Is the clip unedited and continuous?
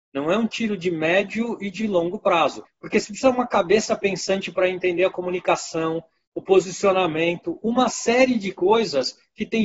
no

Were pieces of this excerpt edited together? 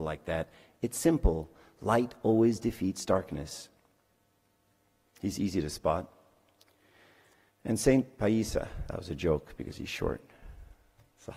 yes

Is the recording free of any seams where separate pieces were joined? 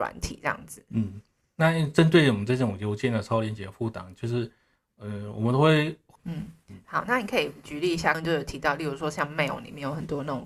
no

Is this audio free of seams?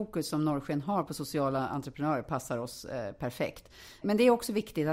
no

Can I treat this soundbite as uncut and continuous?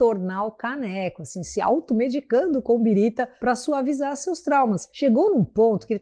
yes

